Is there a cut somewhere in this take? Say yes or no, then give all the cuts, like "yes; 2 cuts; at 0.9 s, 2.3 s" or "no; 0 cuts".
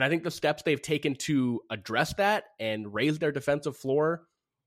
no; 0 cuts